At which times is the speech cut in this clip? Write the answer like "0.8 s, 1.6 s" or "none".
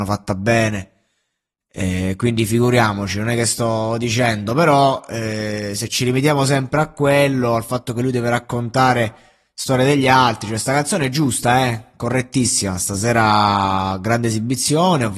none